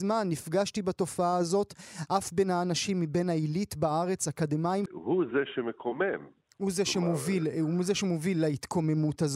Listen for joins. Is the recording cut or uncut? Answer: cut